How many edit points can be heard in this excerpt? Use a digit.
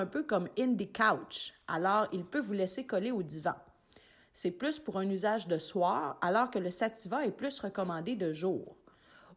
0